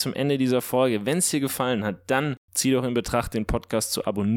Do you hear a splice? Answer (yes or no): yes